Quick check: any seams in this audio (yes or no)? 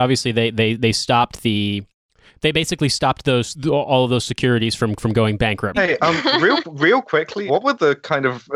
yes